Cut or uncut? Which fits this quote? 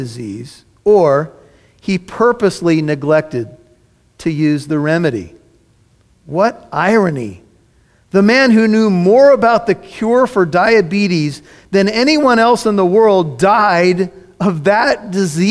uncut